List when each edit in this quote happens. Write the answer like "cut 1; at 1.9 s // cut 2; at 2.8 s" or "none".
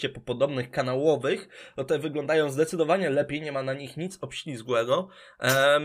none